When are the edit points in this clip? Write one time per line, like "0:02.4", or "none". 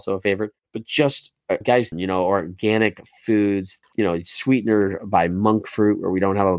0:01.9
0:03.8